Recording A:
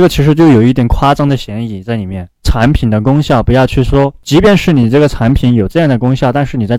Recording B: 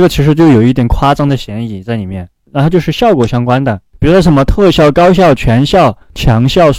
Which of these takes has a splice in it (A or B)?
A